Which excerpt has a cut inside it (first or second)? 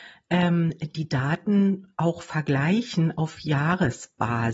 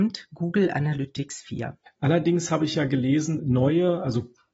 second